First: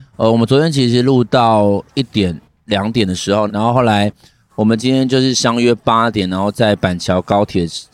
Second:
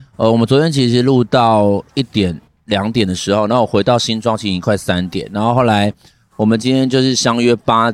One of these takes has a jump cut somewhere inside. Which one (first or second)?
first